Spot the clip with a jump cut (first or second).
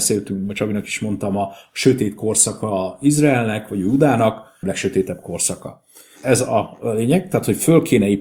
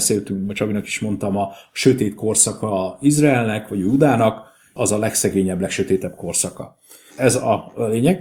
first